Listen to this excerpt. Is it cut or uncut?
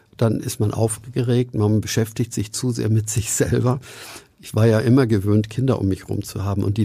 uncut